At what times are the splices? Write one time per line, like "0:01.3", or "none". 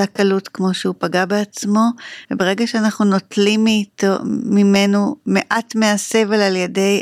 0:02.2